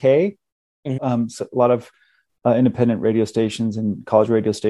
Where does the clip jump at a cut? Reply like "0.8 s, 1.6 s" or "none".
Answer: 1.0 s